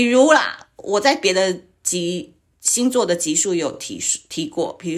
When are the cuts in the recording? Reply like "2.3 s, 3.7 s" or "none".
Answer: none